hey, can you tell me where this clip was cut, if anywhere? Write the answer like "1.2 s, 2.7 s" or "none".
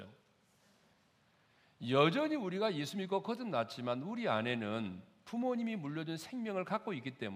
none